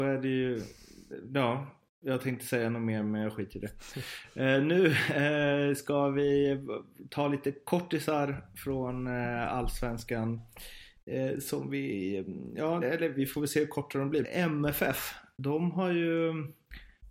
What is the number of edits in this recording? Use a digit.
2